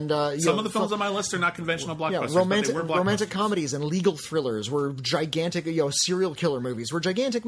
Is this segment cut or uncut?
uncut